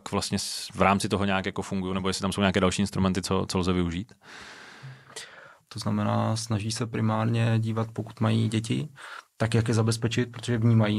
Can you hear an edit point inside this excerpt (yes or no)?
yes